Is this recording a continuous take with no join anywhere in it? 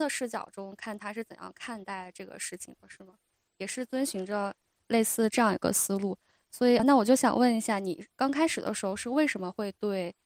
yes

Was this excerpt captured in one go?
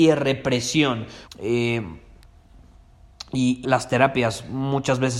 no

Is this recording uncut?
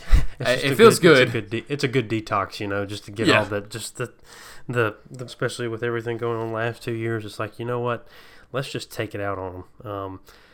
no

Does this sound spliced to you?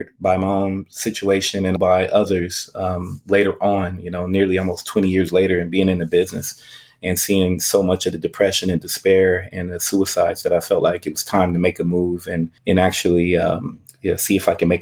yes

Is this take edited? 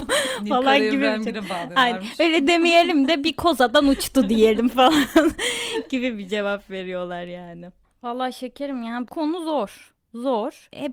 no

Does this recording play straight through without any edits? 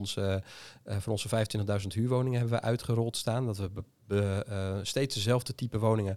yes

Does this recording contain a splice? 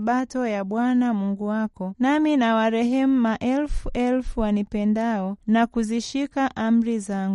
yes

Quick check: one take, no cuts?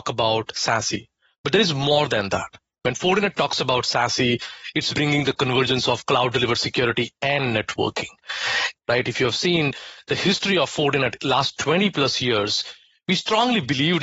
no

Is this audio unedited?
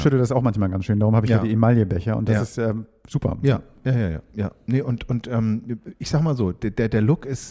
yes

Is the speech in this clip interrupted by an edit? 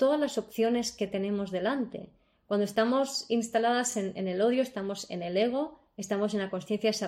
no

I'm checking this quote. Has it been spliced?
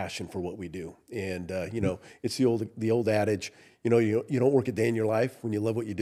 no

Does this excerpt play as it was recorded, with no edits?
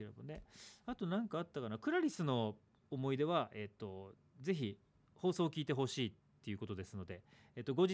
yes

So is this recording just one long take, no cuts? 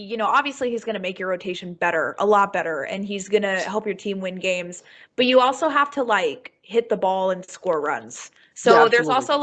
yes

